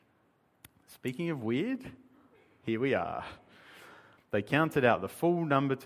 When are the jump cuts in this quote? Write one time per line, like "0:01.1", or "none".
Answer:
0:04.2